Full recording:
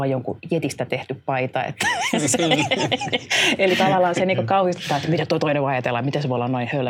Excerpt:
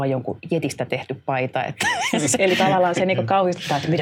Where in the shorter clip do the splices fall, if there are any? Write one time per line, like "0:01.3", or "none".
0:02.4